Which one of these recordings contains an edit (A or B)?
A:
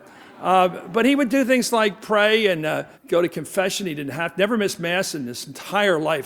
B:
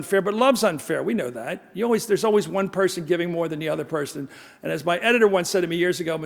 A